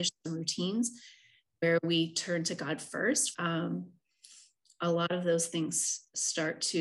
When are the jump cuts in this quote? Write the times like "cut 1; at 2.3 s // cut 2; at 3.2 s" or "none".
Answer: cut 1; at 3.3 s